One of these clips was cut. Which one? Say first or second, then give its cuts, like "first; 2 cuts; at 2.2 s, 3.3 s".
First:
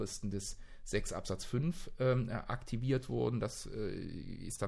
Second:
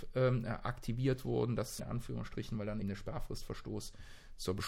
second; 2 cuts; at 1.8 s, 2.8 s